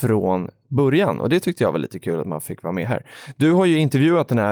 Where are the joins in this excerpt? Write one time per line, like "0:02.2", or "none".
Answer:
none